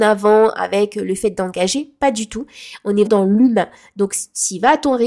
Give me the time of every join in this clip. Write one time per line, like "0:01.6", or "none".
0:03.1